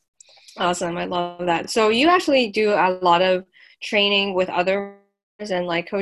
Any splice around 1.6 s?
no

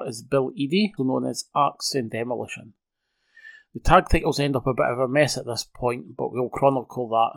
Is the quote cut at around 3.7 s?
no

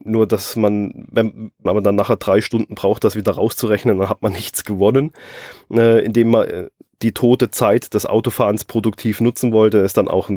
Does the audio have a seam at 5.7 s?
no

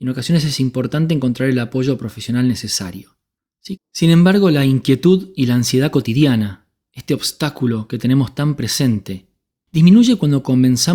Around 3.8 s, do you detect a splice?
yes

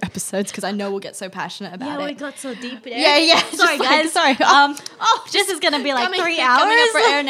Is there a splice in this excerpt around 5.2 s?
no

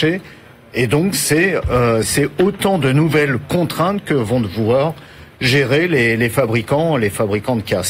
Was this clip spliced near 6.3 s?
no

